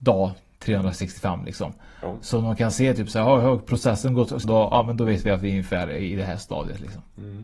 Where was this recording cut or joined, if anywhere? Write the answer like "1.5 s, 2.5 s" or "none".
4.4 s